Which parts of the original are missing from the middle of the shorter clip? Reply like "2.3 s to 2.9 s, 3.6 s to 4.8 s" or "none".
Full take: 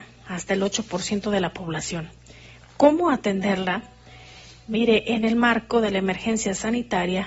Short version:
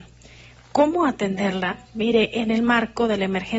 3.9 s to 4.6 s